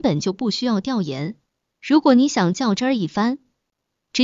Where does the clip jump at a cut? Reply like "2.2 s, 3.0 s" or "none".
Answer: 1.7 s